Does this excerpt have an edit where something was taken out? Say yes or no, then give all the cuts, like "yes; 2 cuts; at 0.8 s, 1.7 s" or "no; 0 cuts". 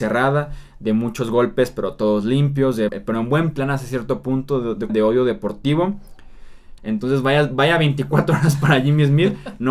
yes; 3 cuts; at 2.9 s, 4.9 s, 6.8 s